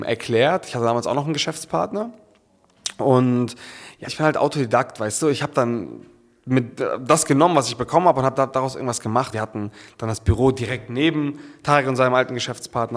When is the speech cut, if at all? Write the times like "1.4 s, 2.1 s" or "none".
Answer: 4.1 s, 9.3 s